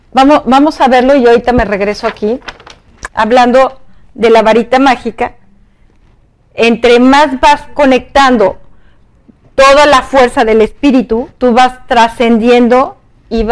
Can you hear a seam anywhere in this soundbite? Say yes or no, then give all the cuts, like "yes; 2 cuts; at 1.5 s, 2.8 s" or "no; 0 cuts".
yes; 2 cuts; at 3.1 s, 11.4 s